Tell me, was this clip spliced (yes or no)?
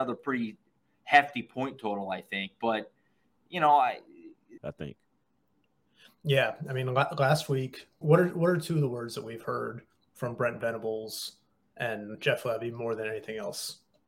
yes